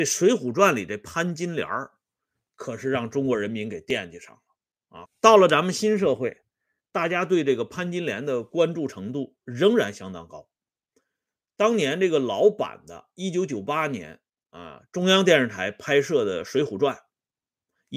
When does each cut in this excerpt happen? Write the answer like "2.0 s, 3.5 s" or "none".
5.1 s